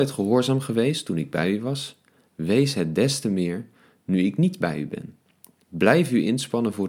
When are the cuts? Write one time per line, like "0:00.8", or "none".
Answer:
none